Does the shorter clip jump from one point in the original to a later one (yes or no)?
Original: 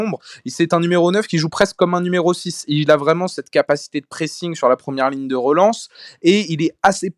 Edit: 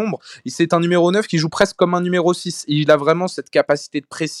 no